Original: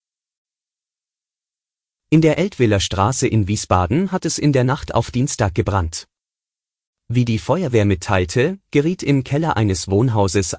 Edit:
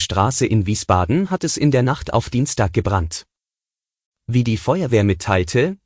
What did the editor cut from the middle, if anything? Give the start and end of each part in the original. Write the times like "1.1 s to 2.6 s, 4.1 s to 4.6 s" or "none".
none